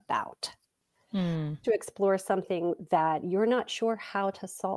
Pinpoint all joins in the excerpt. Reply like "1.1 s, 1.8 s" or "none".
1.6 s